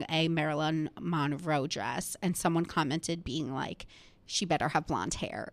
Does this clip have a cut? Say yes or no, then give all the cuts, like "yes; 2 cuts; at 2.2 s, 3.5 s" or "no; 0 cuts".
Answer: no; 0 cuts